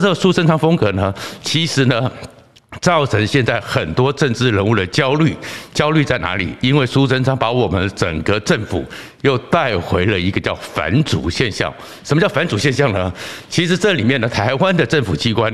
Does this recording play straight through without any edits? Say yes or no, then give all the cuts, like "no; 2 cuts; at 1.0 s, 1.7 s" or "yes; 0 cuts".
yes; 0 cuts